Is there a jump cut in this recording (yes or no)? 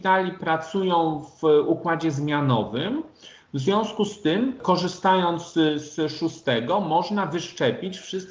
no